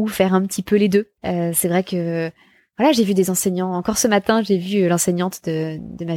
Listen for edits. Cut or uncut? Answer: cut